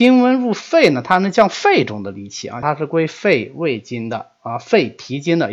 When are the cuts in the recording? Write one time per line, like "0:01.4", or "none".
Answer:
0:02.6